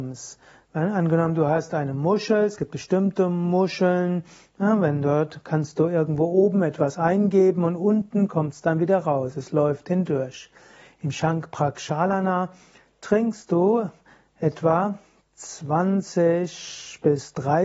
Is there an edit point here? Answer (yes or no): no